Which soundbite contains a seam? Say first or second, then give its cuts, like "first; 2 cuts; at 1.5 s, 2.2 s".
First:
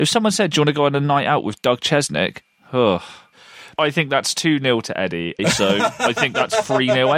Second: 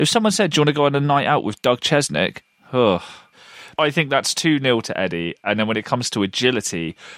first; 1 cut; at 5.4 s